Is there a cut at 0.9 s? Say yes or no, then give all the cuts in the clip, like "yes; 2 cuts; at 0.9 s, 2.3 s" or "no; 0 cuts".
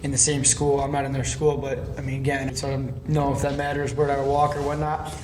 no; 1 cut; at 2.5 s